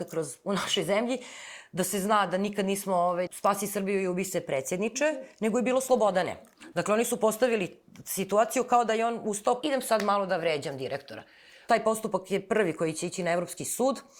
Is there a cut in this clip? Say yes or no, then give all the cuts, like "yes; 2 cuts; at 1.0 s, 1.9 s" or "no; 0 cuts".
yes; 3 cuts; at 3.3 s, 6.7 s, 9.6 s